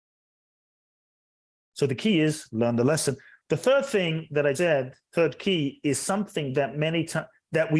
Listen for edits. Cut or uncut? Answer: cut